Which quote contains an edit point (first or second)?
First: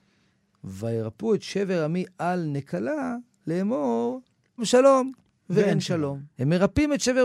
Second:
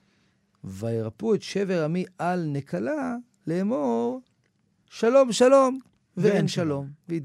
first